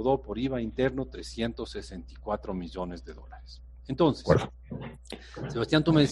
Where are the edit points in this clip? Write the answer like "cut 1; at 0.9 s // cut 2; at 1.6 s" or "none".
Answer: none